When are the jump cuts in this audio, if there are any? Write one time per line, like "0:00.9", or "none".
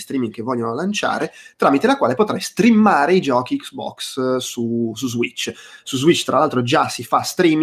none